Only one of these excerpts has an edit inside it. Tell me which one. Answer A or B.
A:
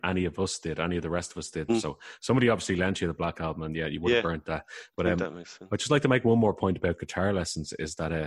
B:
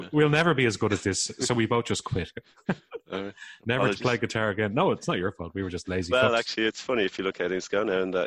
A